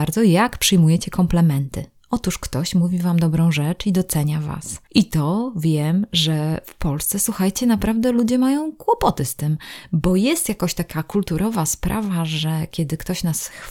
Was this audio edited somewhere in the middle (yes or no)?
no